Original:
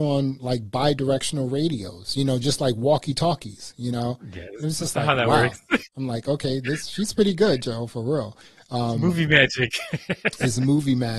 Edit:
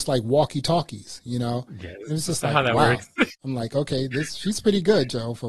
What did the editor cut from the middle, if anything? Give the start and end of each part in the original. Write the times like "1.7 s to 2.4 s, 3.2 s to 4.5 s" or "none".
none

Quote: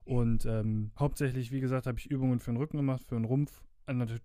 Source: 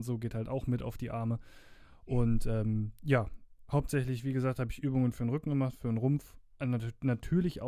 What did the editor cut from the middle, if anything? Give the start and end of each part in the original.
2.9 s to 3.7 s

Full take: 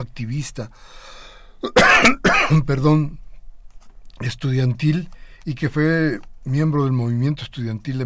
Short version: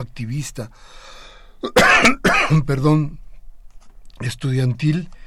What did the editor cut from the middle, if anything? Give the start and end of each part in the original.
none

